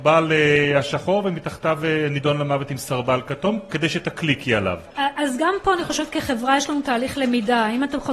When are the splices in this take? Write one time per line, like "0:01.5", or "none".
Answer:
none